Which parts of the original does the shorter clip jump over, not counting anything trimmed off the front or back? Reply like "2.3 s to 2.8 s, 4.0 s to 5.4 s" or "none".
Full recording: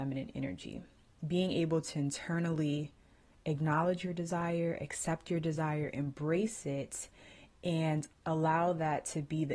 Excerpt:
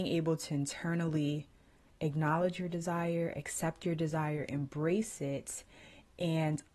none